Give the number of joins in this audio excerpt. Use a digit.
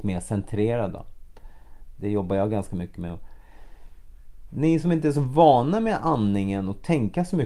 1